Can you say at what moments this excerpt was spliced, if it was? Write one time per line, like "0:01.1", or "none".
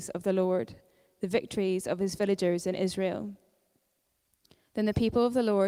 none